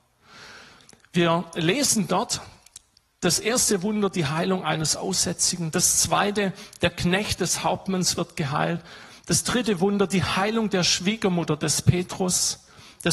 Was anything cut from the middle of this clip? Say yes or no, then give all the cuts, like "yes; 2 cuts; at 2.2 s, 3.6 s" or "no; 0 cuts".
no; 0 cuts